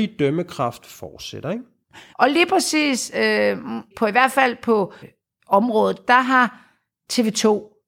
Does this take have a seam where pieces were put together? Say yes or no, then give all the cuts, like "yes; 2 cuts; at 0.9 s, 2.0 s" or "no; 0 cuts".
yes; 3 cuts; at 2.1 s, 3.9 s, 5.0 s